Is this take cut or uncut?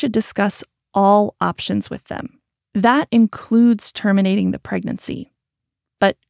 uncut